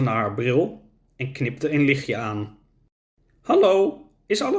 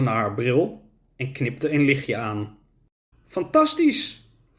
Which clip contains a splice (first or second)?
second